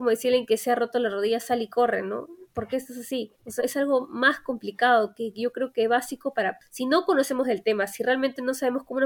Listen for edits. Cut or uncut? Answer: cut